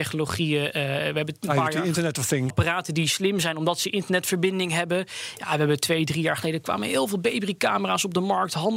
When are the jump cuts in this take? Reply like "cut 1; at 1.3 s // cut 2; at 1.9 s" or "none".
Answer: cut 1; at 2.5 s